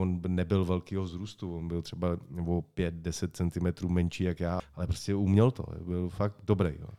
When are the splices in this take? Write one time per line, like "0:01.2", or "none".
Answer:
0:04.6